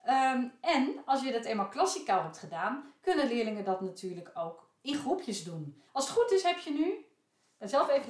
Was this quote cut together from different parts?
yes; 1 cut; at 5.9 s

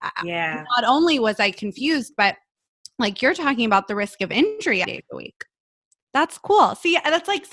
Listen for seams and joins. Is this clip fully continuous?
no; 1 cut; at 4.8 s

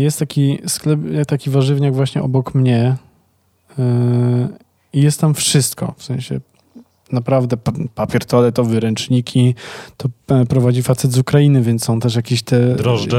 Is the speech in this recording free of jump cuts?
yes; 0 cuts

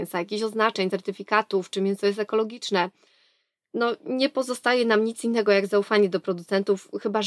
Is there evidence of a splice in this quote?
no; 0 cuts

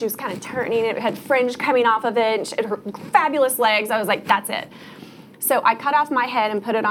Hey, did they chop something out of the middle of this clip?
no; 0 cuts

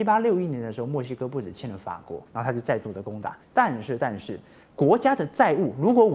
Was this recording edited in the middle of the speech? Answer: yes; 2 cuts; at 2.3 s, 3.4 s

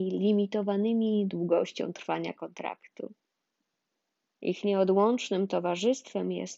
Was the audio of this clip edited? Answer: no; 0 cuts

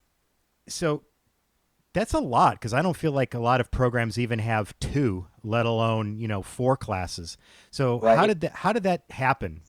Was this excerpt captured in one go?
yes; 0 cuts

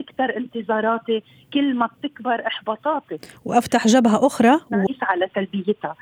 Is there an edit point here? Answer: yes; 1 cut; at 4.9 s

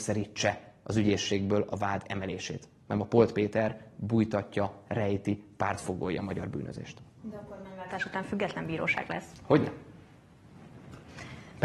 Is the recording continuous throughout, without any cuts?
yes; 0 cuts

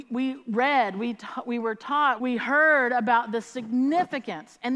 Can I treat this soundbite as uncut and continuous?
no; 1 cut; at 2.2 s

